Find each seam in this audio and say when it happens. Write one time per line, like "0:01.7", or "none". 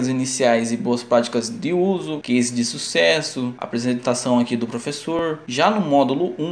0:02.2